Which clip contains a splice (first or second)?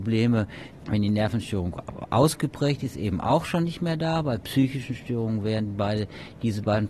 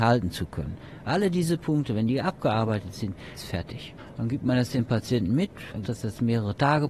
second